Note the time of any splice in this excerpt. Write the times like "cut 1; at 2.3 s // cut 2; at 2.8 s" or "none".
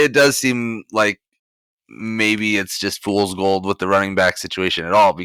none